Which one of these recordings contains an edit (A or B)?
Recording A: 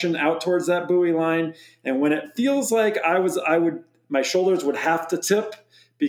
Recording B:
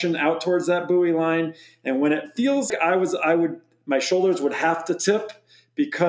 B